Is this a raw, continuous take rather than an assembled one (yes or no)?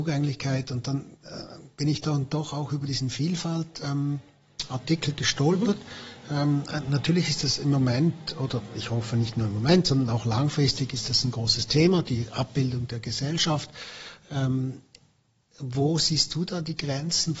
yes